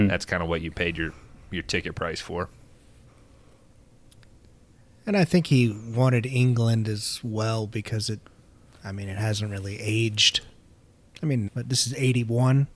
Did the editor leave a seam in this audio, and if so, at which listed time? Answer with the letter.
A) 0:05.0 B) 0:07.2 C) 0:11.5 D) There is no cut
C